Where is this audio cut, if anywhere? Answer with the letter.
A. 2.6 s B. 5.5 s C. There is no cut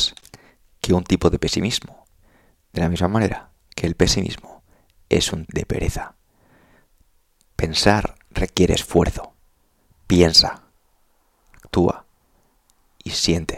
B